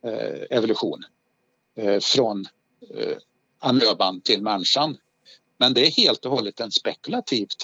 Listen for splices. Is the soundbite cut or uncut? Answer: uncut